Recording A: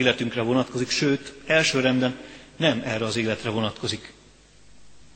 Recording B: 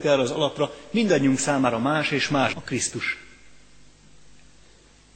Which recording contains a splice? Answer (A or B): B